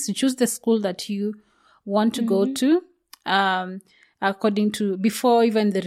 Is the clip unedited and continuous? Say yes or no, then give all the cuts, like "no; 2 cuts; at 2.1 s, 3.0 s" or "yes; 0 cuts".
yes; 0 cuts